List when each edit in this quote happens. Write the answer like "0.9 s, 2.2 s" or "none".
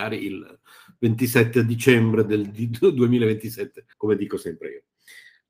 3.9 s

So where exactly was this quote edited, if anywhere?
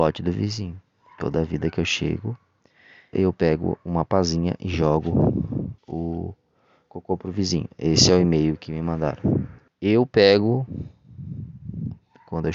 3.1 s, 5.8 s, 9.7 s

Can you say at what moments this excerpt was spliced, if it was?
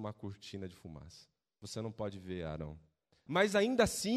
3.3 s

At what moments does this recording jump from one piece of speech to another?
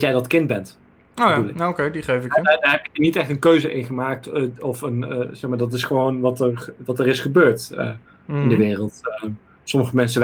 none

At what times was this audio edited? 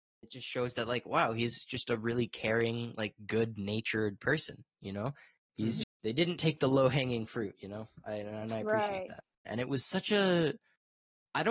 5.8 s, 9.4 s

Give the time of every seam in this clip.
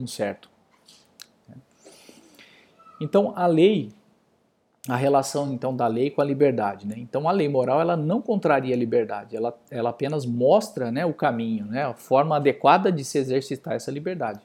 none

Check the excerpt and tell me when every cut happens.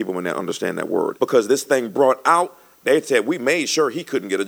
1.2 s

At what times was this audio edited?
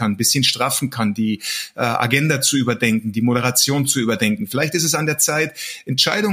none

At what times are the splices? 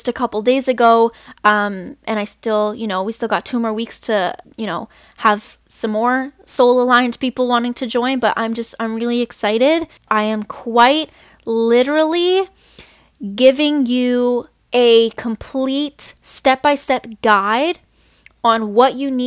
10.1 s, 16.2 s

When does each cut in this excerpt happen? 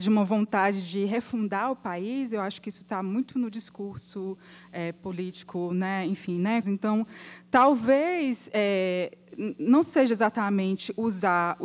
6.6 s

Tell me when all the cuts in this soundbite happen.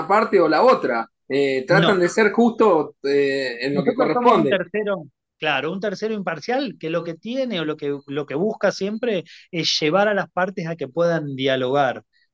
none

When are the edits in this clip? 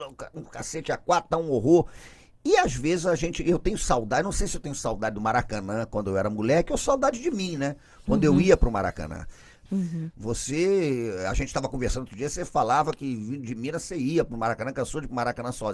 9.7 s

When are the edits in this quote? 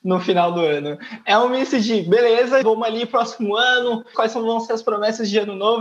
2.6 s, 4.1 s

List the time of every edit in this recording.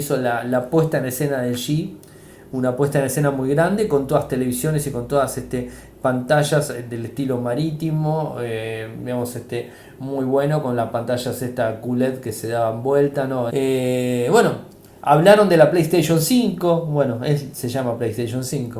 13.5 s

